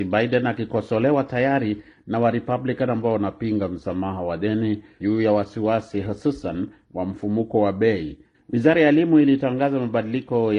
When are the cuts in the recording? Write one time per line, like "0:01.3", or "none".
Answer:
0:05.0
0:08.3